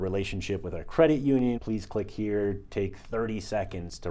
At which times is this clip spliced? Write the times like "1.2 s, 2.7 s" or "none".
1.6 s